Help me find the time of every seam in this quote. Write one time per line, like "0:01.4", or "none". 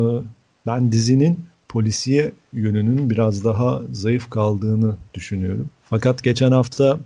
0:05.8